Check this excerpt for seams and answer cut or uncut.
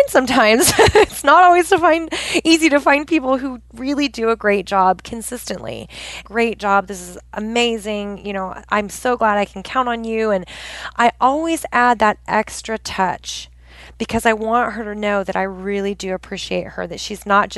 cut